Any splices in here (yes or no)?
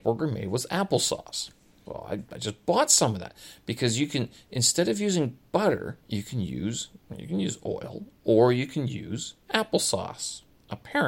yes